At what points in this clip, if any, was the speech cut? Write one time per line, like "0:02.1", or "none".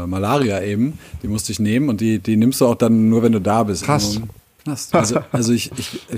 0:03.8
0:04.9